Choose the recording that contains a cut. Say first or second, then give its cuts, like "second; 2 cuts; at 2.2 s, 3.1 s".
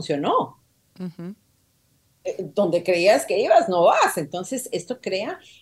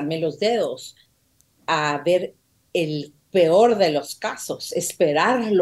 second; 1 cut; at 1.5 s